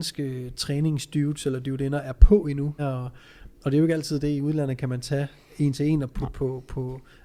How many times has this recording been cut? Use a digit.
1